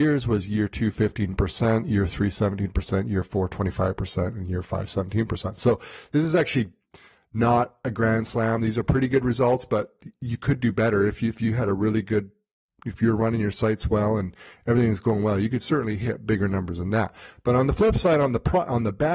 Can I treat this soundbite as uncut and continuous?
yes; 0 cuts

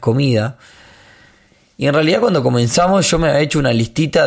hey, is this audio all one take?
yes; 0 cuts

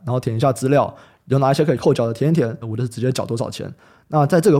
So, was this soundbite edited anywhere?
yes; 1 cut; at 2.6 s

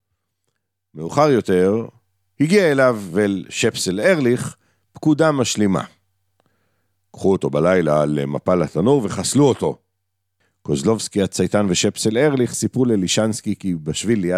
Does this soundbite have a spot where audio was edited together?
no; 0 cuts

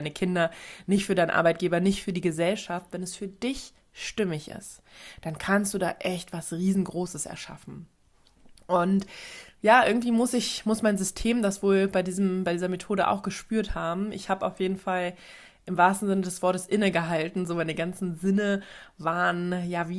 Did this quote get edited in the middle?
no; 0 cuts

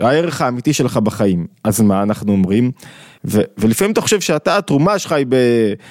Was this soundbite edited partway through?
yes; 1 cut; at 3.2 s

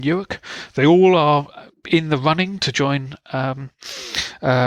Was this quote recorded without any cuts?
yes; 0 cuts

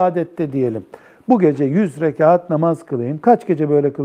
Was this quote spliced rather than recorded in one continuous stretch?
no; 0 cuts

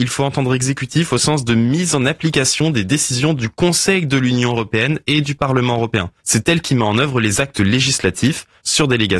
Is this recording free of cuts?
no; 1 cut; at 6.2 s

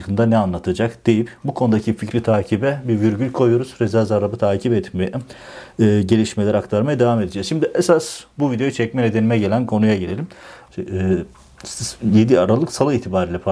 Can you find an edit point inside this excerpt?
yes; 1 cut; at 10.7 s

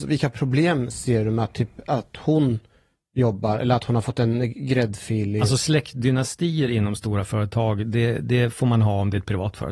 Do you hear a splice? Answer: no; 0 cuts

